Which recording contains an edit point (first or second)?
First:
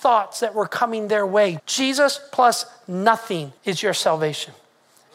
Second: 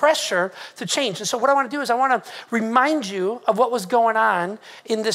first